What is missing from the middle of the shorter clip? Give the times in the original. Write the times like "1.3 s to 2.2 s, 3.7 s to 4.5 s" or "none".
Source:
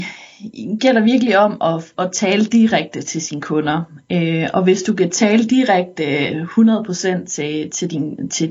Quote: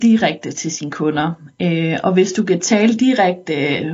none